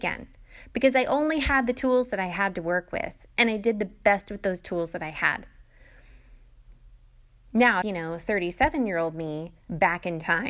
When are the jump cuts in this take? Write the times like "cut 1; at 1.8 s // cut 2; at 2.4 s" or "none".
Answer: cut 1; at 7.8 s

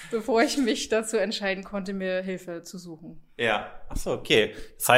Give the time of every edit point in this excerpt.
none

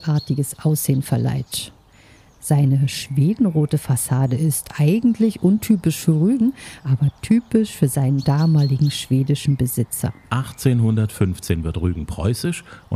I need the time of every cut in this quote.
none

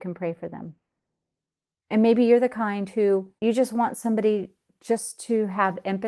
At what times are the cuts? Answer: cut 1; at 1.7 s // cut 2; at 3.4 s

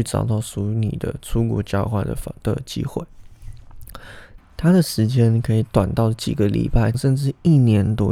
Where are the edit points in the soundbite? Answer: cut 1; at 4.4 s // cut 2; at 6.9 s

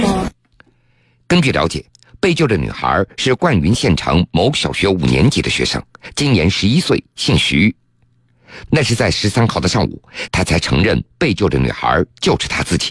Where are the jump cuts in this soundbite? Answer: cut 1; at 8.7 s // cut 2; at 10.3 s

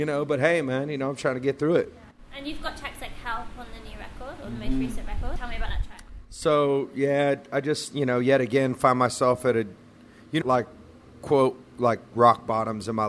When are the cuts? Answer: cut 1; at 10.4 s

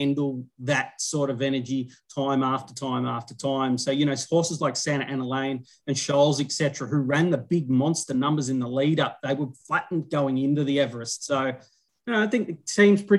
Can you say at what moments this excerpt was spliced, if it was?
none

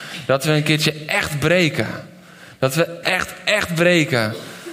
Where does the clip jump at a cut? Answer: cut 1; at 3.0 s

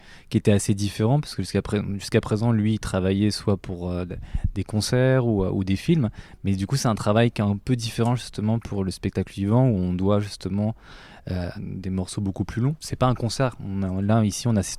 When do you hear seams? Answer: cut 1; at 11.6 s // cut 2; at 12.8 s

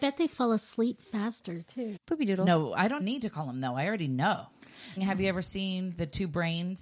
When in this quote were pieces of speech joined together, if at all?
cut 1; at 2.0 s // cut 2; at 3.0 s // cut 3; at 5.0 s

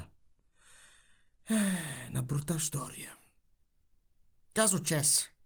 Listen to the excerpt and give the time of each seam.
none

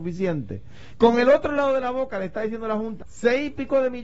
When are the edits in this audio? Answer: cut 1; at 0.9 s // cut 2; at 3.0 s

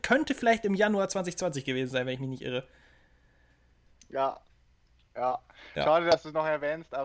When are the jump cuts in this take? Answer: none

